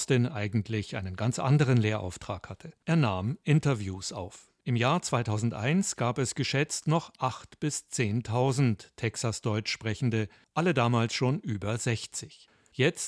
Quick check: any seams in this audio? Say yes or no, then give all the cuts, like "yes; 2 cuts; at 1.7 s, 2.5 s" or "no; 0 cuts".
yes; 1 cut; at 2.8 s